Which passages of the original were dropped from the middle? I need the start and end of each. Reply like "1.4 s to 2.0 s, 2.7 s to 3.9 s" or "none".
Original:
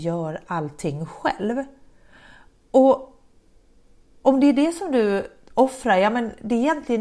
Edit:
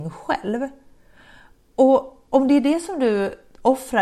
3.2 s to 4.2 s